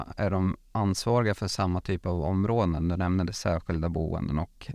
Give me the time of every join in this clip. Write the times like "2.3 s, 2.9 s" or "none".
none